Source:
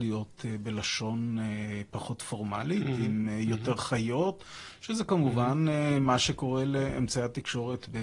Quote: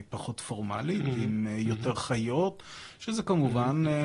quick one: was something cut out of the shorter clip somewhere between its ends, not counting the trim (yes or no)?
no